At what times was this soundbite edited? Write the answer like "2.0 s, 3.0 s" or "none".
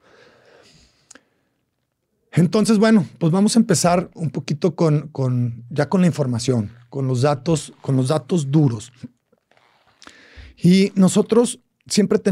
none